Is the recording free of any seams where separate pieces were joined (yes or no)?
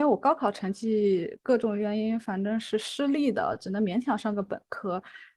yes